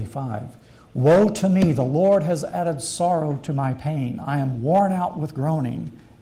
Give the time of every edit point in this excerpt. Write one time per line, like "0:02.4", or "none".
none